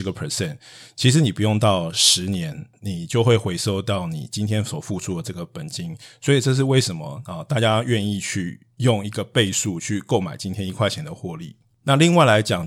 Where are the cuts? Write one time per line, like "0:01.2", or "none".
none